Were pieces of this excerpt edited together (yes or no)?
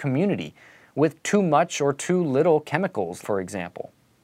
yes